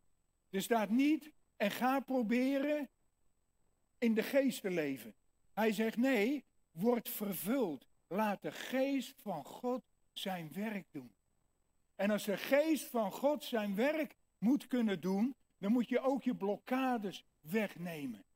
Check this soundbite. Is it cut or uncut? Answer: cut